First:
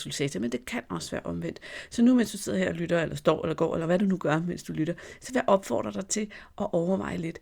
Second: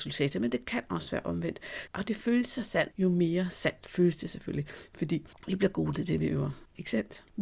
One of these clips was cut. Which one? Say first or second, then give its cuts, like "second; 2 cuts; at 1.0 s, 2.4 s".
second; 2 cuts; at 1.9 s, 2.9 s